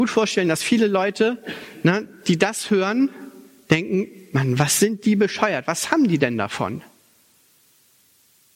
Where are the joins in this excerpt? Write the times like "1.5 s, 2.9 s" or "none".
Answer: none